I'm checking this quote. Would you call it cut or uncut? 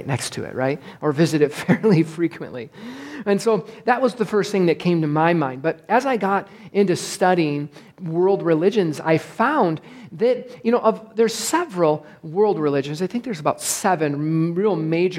cut